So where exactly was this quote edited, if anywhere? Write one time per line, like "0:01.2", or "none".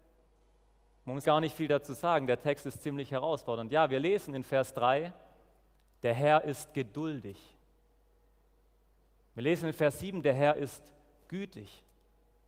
0:01.2